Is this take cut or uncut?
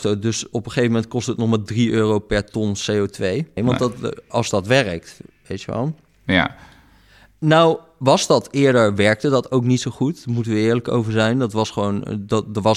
cut